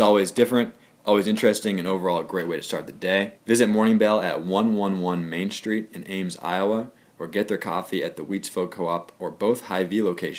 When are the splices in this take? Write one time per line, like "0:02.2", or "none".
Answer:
0:03.4